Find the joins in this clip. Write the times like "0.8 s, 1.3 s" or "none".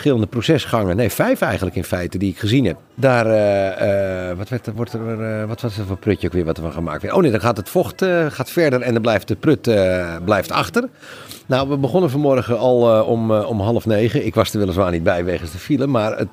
2.8 s, 4.7 s, 11.4 s